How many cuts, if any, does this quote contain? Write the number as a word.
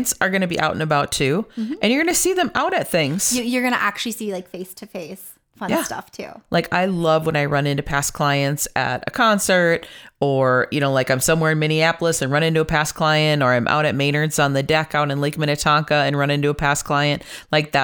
zero